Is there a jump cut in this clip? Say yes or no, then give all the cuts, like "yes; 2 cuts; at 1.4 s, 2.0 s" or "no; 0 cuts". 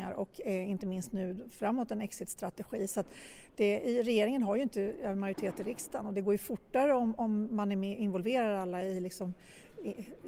no; 0 cuts